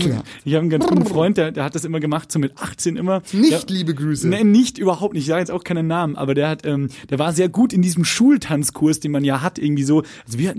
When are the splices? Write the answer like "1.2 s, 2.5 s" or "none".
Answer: none